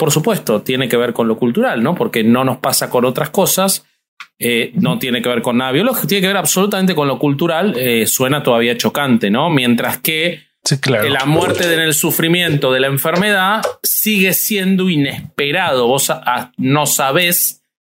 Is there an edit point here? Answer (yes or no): no